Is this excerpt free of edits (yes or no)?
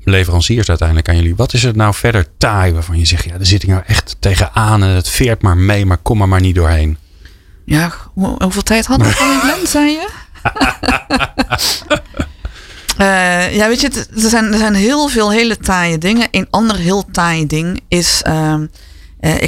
yes